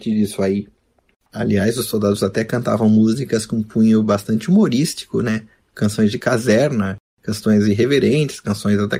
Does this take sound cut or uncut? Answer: cut